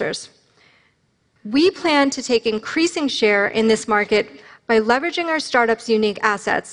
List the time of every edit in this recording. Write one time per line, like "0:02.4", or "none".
0:01.4